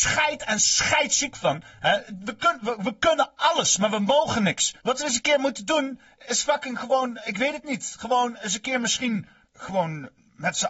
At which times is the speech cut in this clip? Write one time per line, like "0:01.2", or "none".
0:04.8
0:09.4